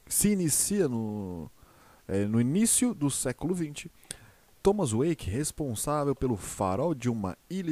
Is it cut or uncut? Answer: uncut